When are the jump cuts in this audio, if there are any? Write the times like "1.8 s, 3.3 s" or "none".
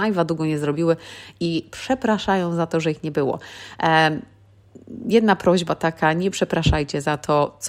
none